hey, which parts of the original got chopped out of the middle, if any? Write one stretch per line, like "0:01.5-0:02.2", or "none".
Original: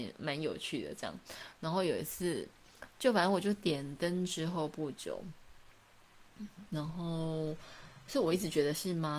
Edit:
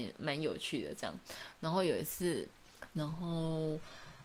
0:02.9-0:06.7